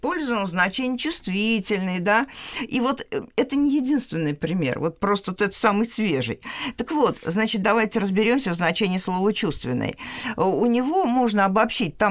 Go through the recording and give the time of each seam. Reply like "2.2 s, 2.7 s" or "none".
none